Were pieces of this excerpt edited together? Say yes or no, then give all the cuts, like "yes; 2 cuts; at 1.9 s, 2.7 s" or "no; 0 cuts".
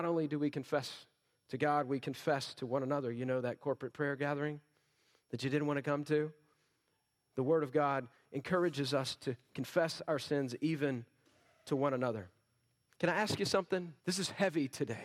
yes; 1 cut; at 14.0 s